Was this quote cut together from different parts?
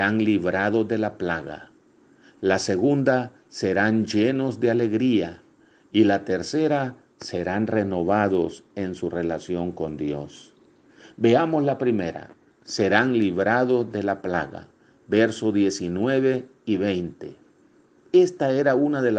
no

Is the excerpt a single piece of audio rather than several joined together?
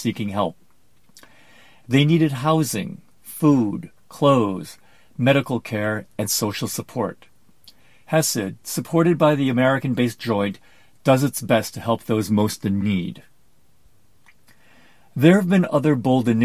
yes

